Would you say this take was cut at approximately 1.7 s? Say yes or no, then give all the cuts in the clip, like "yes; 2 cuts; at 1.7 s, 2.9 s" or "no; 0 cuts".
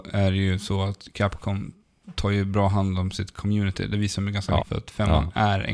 no; 1 cut; at 4.6 s